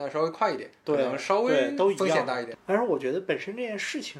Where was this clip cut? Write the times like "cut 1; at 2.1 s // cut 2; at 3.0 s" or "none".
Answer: cut 1; at 2.5 s